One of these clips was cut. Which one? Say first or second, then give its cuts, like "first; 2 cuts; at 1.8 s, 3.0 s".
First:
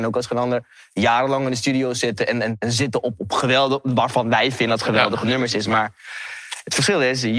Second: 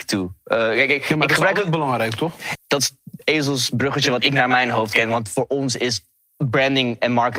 second; 1 cut; at 2.5 s